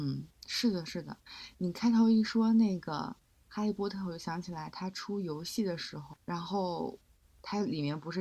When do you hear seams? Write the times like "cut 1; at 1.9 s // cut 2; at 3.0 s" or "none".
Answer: cut 1; at 6.1 s